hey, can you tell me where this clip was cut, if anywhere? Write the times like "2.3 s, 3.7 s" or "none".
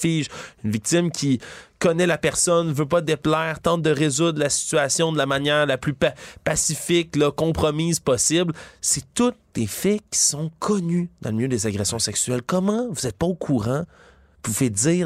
none